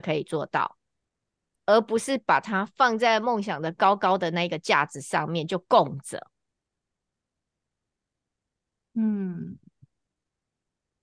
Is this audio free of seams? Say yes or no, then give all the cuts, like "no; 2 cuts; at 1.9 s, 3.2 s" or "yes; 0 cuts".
yes; 0 cuts